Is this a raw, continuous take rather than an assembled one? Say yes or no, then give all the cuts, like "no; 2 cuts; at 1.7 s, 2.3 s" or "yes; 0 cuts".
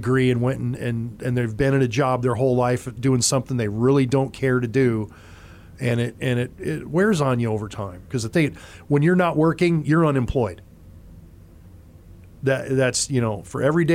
no; 1 cut; at 8.1 s